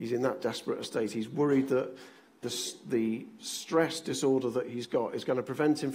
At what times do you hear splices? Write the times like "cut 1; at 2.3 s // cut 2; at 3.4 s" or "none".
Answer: cut 1; at 2.4 s

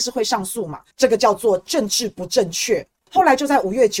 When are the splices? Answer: cut 1; at 0.9 s // cut 2; at 3.0 s

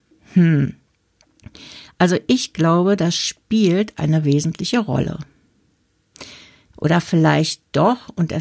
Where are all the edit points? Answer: cut 1; at 6.7 s

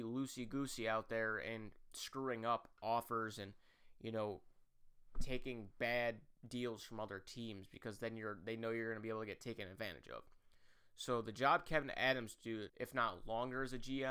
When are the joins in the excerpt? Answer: cut 1; at 12.7 s

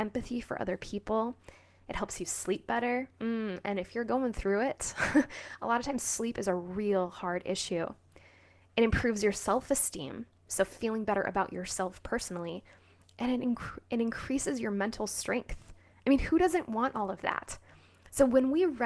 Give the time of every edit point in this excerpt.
none

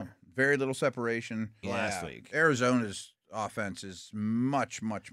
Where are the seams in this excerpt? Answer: cut 1; at 1.6 s

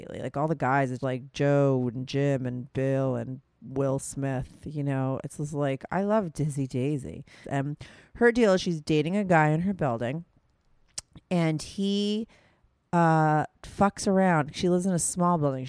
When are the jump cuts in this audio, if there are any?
cut 1; at 1.0 s // cut 2; at 7.4 s

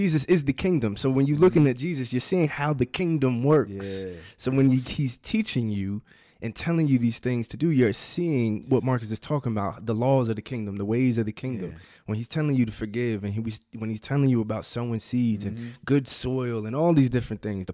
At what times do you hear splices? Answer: none

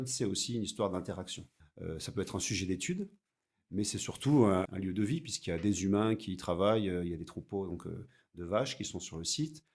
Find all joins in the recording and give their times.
cut 1; at 1.6 s // cut 2; at 4.7 s

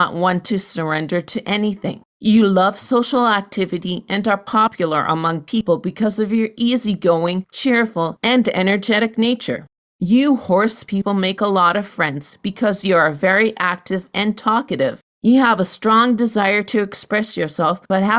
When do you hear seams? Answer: none

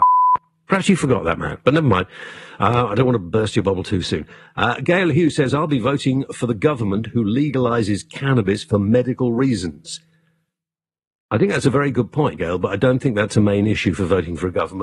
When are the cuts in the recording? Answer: cut 1; at 12.4 s

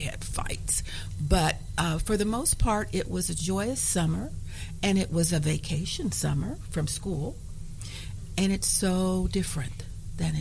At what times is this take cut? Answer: none

